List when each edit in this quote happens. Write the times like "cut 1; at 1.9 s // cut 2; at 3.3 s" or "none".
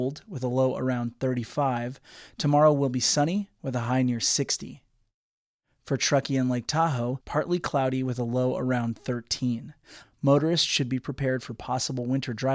cut 1; at 7.2 s // cut 2; at 10.0 s